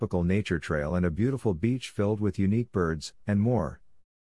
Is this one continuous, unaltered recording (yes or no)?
no